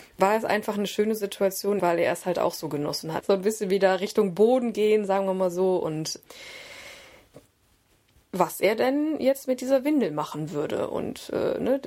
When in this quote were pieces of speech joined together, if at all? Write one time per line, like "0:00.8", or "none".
0:01.8
0:03.2
0:08.2